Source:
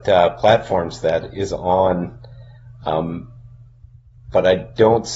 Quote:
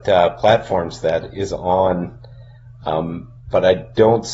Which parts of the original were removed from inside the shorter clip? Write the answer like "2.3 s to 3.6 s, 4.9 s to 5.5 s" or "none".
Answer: 3.4 s to 4.2 s